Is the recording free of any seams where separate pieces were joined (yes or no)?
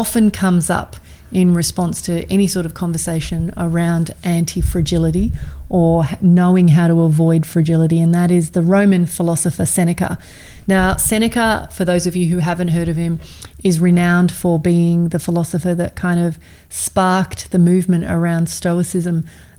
yes